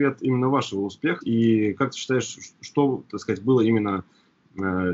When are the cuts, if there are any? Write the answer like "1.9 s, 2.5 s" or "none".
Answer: 1.2 s